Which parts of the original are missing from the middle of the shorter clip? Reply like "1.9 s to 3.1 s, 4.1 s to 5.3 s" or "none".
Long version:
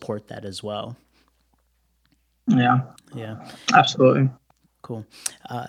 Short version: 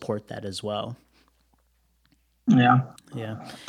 none